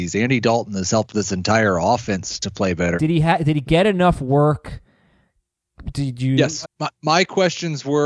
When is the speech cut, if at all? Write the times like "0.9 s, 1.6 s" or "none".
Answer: 3.0 s, 6.6 s